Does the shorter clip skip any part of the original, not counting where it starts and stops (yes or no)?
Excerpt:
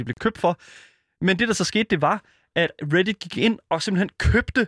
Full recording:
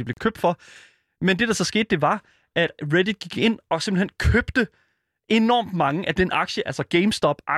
no